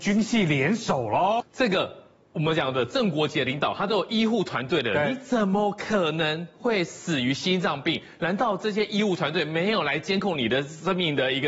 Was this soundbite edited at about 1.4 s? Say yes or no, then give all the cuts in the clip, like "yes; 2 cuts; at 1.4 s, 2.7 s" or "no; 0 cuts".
yes; 1 cut; at 1.4 s